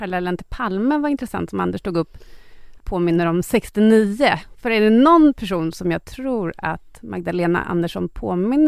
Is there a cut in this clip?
yes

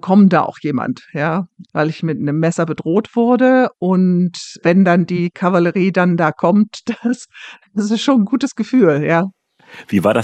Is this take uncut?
no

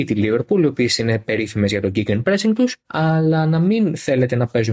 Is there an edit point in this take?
yes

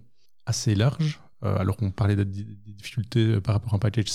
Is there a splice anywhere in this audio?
no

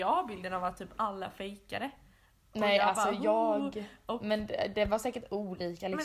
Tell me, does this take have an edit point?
no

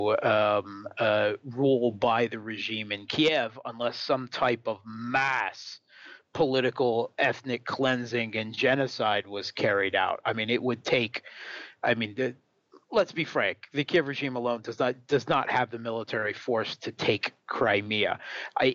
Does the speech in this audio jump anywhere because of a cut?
no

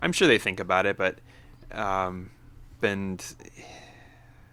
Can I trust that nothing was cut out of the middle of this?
no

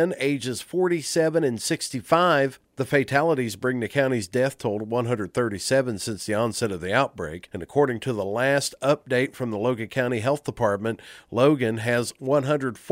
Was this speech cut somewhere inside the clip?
no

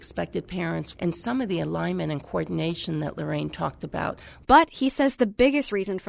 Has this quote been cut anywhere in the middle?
yes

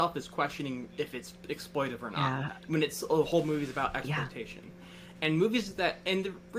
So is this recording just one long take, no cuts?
yes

